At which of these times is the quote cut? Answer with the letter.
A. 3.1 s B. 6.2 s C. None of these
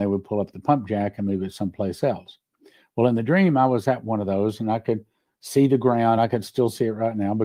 C